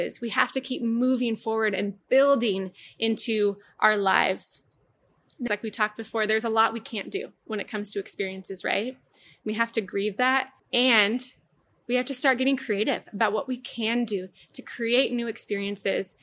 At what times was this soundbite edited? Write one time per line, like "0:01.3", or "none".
0:05.5
0:10.6